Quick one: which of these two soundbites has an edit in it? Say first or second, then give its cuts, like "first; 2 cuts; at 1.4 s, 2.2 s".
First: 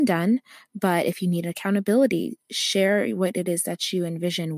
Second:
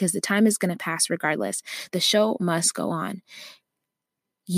second; 1 cut; at 1.9 s